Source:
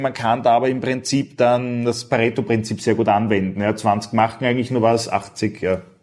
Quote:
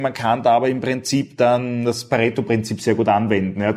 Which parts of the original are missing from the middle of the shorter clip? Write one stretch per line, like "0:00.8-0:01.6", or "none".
none